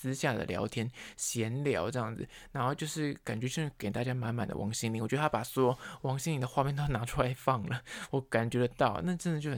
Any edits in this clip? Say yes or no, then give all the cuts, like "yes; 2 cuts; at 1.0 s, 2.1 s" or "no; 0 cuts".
no; 0 cuts